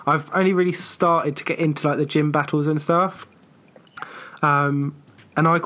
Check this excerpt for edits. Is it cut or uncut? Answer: uncut